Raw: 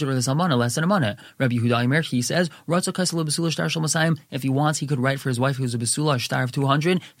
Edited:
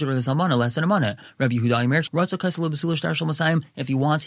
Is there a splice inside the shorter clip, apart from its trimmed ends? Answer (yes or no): yes